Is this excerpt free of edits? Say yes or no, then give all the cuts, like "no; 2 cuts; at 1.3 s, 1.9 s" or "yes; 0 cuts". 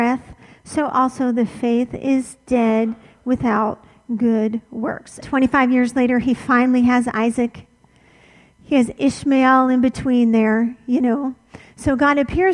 no; 1 cut; at 5.2 s